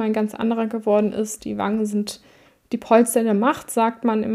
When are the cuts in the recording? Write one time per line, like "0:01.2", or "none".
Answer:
none